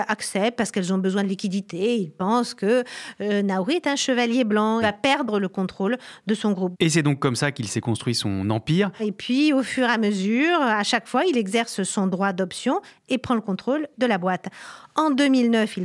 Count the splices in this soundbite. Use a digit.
3